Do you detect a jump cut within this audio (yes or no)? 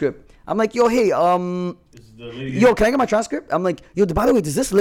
no